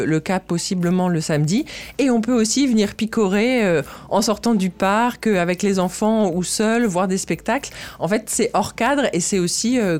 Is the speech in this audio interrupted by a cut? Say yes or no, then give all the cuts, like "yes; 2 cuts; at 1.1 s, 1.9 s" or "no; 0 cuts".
no; 0 cuts